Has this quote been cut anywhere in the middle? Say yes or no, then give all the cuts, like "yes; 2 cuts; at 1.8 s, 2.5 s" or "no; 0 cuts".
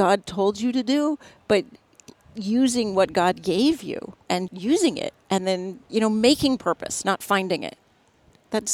yes; 2 cuts; at 4.5 s, 5.8 s